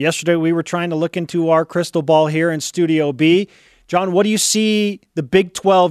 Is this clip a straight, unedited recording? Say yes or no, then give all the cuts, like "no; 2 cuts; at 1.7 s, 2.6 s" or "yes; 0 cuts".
yes; 0 cuts